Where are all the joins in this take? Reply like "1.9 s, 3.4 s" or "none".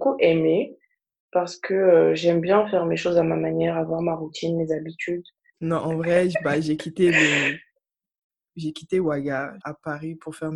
5.5 s, 9.6 s